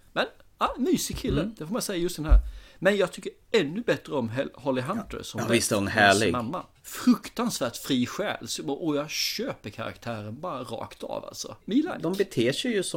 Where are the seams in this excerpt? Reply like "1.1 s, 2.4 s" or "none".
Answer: none